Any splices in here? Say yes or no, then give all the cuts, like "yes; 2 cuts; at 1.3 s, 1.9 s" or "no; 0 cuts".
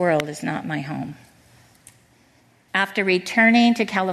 yes; 1 cut; at 2.7 s